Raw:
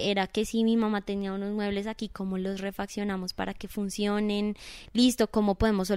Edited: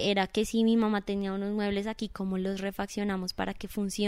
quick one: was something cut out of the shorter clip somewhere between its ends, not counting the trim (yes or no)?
no